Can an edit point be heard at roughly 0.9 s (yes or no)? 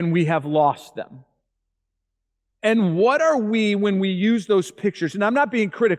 no